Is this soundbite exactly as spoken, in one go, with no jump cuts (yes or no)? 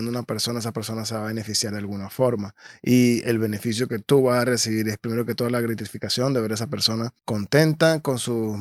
no